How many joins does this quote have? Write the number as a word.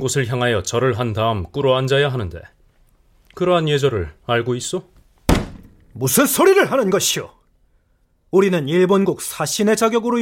zero